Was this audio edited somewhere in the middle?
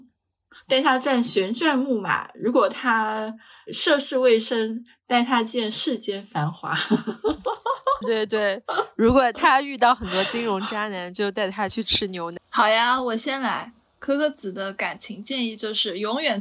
yes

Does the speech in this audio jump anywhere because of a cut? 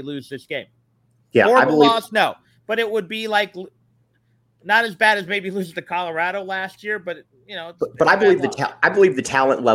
no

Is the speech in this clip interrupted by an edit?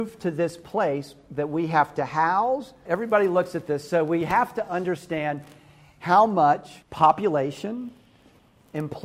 yes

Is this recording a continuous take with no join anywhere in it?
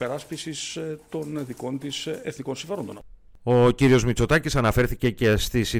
yes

